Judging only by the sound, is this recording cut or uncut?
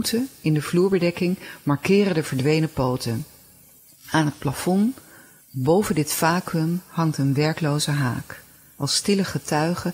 uncut